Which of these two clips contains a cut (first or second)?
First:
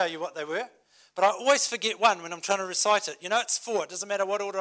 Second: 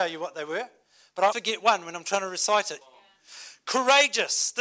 second